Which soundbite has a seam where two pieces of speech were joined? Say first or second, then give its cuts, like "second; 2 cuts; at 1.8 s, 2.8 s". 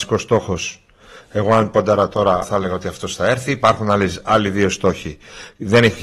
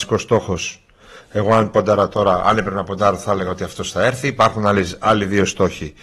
first; 1 cut; at 2.4 s